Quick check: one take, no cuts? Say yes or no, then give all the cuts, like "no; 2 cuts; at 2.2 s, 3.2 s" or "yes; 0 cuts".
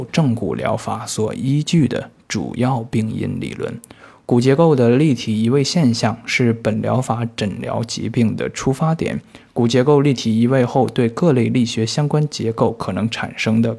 yes; 0 cuts